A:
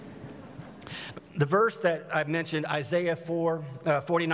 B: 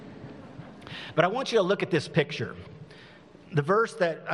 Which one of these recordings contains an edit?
A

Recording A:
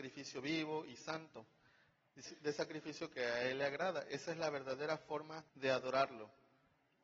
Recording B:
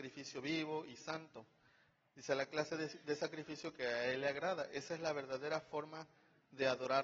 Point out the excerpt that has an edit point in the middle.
A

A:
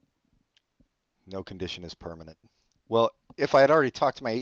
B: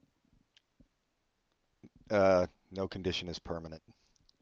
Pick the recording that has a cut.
A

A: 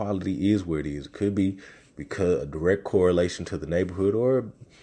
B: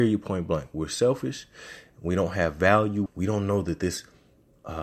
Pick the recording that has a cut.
B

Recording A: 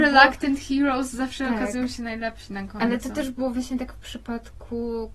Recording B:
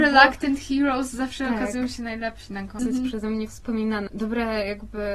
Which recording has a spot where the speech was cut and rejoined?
B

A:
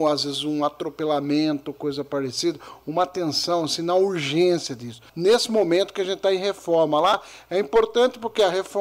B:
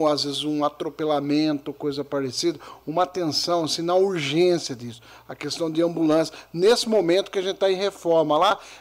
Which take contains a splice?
A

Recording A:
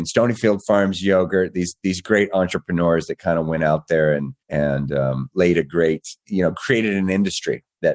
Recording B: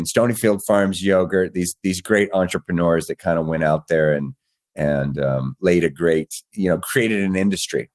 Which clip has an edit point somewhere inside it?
A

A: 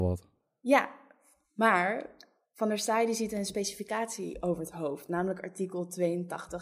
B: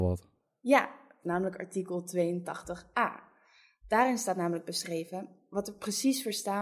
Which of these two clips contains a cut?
B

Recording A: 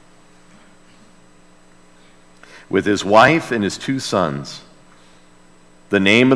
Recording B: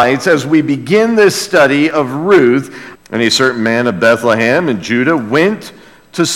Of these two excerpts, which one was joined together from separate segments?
B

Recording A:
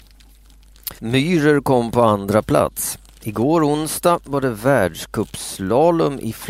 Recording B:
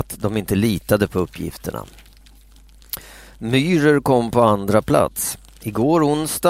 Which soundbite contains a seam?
A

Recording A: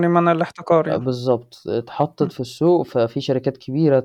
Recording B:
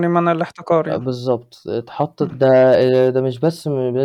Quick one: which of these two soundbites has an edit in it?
B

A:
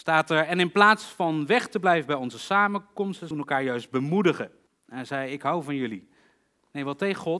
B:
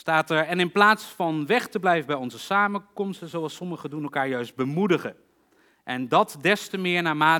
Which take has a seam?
A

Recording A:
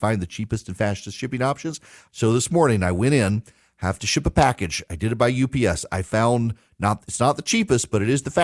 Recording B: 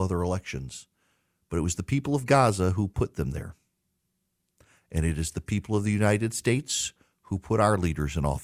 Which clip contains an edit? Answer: A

